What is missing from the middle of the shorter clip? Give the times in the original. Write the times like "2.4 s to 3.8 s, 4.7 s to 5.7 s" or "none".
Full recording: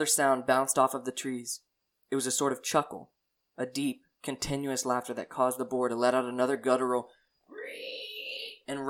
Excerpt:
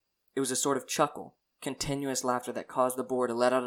3.3 s to 4.1 s